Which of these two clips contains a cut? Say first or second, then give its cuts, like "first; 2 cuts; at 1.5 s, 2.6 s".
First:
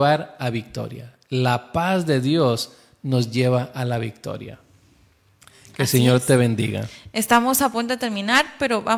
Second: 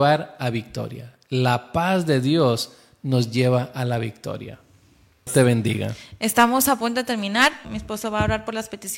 second; 2 cuts; at 5.3 s, 7.6 s